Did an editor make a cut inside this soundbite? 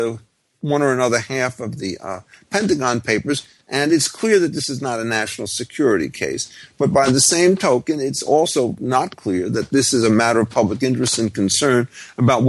no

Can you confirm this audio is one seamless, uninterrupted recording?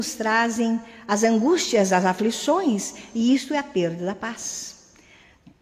yes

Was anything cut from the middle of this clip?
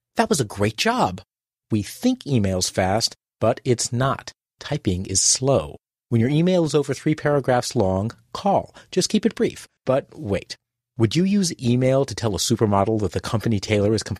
yes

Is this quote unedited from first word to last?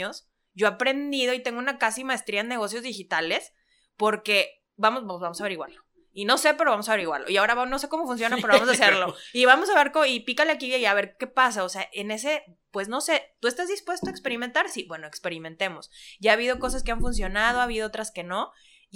yes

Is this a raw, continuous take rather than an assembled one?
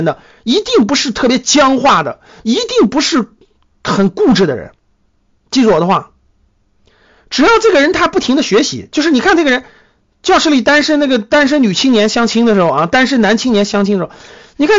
yes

